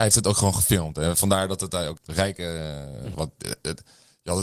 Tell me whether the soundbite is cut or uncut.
cut